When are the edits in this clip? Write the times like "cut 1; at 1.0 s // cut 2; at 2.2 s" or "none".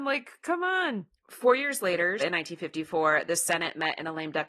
cut 1; at 2.2 s